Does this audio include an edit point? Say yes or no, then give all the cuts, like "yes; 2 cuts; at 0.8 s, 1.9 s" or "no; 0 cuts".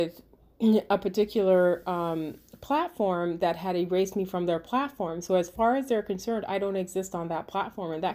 no; 0 cuts